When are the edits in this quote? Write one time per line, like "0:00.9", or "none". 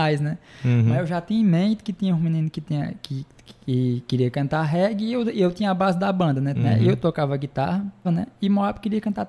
0:06.5
0:08.0